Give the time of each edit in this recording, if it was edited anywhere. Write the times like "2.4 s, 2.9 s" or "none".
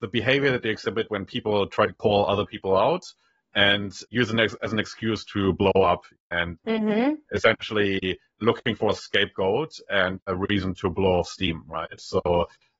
none